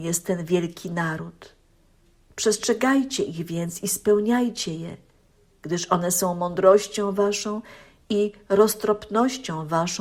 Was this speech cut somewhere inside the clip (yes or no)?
yes